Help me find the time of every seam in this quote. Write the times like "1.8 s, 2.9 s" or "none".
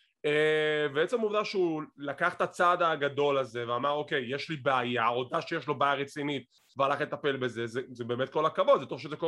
none